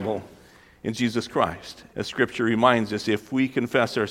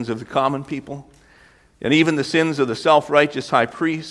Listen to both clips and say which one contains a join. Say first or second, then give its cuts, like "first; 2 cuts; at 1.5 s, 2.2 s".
first; 1 cut; at 1.9 s